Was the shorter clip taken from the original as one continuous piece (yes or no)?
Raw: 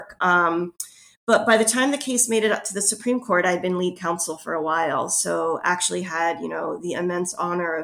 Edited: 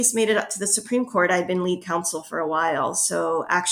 yes